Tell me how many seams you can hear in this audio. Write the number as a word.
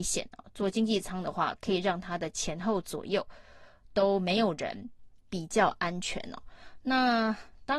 two